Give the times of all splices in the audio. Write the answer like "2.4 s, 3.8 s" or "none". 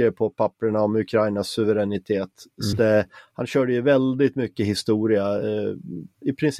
2.7 s